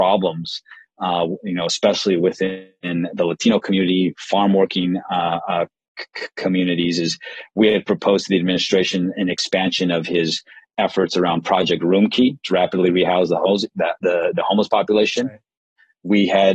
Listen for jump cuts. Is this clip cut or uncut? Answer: uncut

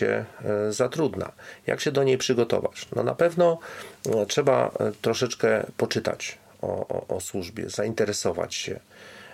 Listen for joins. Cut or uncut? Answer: uncut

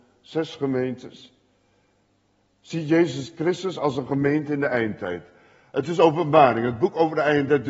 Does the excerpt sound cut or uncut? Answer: uncut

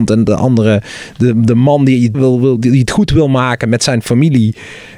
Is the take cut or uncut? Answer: cut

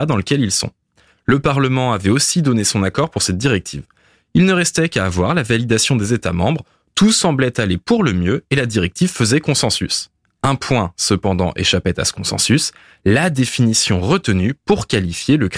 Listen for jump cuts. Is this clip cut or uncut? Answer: uncut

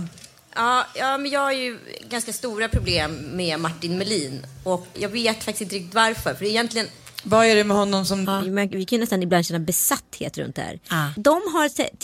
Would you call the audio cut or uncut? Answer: cut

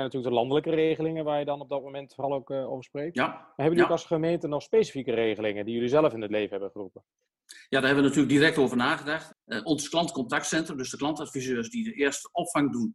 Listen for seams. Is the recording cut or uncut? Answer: cut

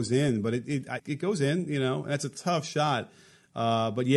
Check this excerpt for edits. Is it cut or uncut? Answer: cut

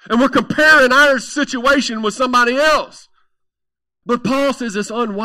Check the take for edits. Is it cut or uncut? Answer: cut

